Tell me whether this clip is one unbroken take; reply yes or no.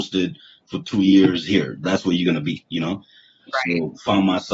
yes